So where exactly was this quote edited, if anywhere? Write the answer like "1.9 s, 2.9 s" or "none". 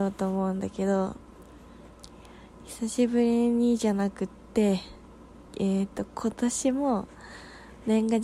5.5 s